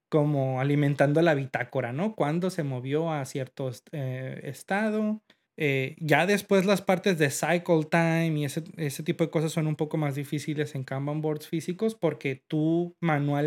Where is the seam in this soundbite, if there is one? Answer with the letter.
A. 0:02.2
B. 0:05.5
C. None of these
B